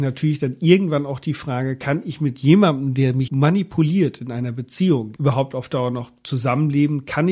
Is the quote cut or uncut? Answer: cut